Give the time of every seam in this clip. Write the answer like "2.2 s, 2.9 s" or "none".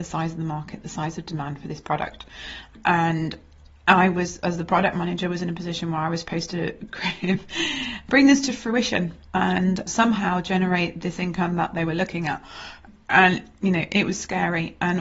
none